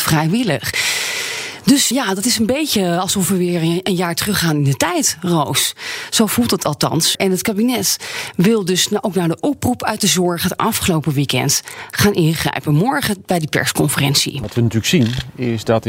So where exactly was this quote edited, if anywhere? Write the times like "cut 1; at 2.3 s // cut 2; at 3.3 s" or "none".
cut 1; at 1.9 s // cut 2; at 7.1 s